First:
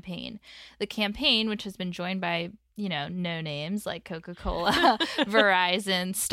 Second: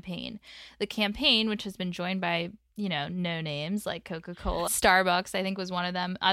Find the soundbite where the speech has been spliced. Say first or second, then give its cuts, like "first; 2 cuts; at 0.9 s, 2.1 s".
second; 1 cut; at 4.7 s